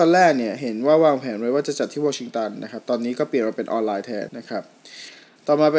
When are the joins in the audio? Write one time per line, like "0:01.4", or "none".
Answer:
0:04.3